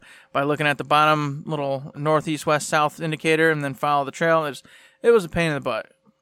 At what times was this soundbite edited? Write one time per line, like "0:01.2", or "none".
0:01.9